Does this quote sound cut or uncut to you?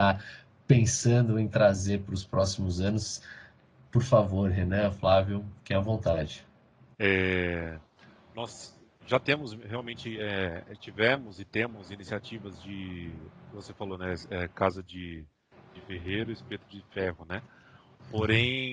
cut